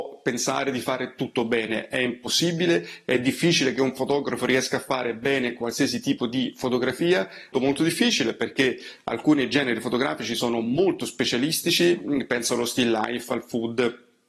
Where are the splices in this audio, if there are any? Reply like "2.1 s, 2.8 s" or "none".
7.5 s